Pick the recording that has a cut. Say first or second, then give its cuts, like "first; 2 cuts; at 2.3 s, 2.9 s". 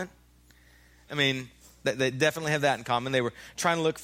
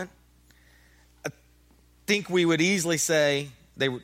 first; 1 cut; at 1.1 s